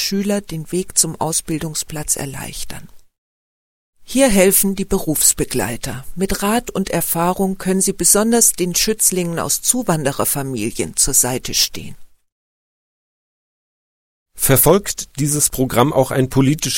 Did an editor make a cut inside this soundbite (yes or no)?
no